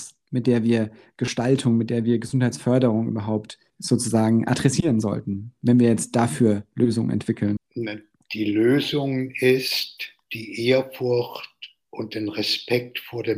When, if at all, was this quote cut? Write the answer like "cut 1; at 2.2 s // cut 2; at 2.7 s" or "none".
cut 1; at 3.7 s // cut 2; at 7.6 s // cut 3; at 10.2 s